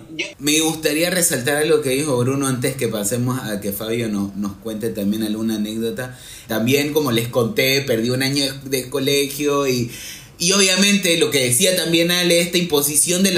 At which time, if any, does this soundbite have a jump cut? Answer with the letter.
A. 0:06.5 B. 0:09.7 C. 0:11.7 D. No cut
A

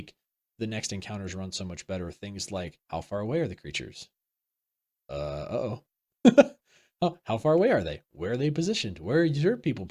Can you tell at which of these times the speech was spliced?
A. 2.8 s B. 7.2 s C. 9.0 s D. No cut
A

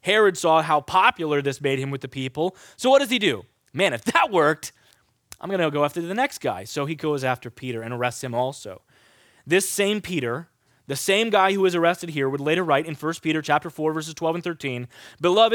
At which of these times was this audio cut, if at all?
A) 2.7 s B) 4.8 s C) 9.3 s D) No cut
D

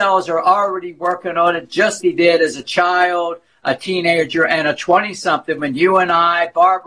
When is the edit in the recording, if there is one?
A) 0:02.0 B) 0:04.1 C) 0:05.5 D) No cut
A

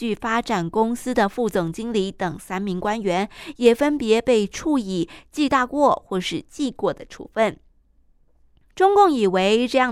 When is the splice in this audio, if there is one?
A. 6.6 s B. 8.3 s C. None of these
C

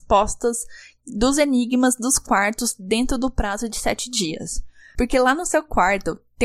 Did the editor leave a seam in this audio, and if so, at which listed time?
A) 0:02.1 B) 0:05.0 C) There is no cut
B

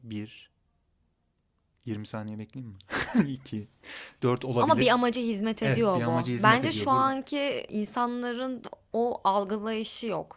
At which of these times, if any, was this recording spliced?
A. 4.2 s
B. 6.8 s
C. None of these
A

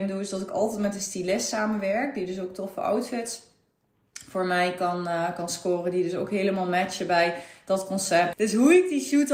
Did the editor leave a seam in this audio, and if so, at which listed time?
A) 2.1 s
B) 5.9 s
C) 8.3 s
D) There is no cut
C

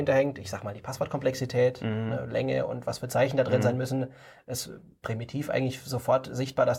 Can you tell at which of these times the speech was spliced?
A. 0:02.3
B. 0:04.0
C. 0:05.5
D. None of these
D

